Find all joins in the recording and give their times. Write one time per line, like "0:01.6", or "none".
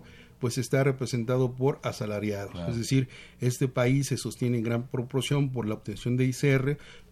none